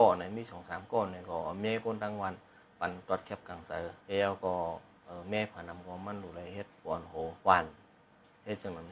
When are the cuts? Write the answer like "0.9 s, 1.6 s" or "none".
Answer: 4.0 s, 7.4 s

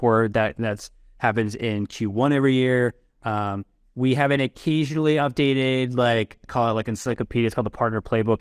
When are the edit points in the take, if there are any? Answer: none

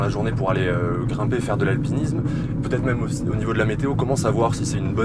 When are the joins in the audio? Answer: none

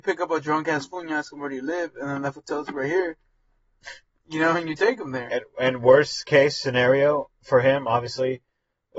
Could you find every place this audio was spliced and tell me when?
none

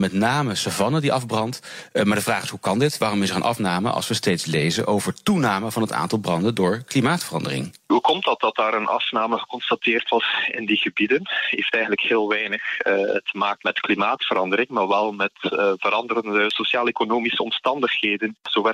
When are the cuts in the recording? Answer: none

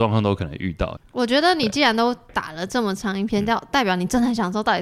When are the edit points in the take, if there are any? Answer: 1.0 s

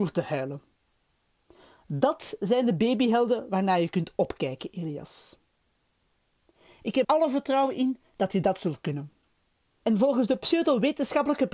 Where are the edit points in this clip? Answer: 7.0 s, 9.8 s

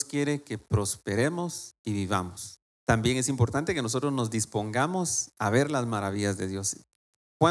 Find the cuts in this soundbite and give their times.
2.7 s

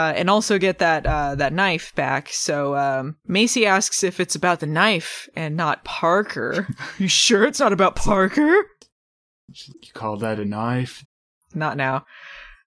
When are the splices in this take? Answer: 9.7 s, 11.0 s

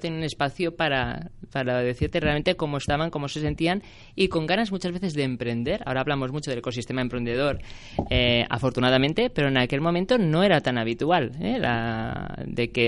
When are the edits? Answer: none

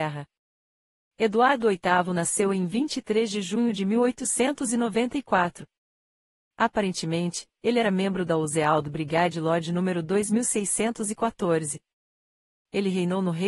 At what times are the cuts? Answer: none

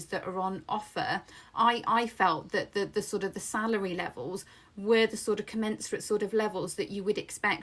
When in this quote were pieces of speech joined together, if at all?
none

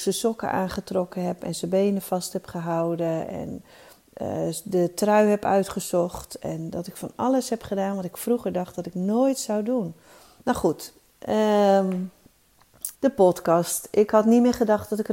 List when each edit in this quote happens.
10.4 s, 12.9 s

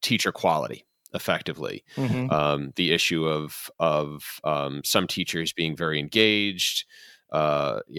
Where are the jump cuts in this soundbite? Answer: none

